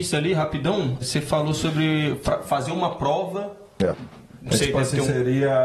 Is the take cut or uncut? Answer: cut